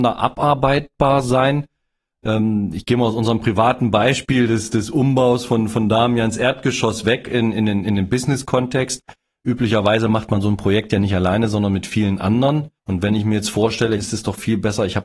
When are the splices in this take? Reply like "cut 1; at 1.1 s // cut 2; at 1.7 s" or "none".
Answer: cut 1; at 12.8 s // cut 2; at 14.0 s